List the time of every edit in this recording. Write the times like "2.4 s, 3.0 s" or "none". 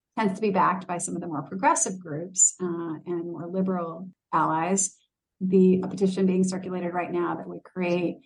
5.8 s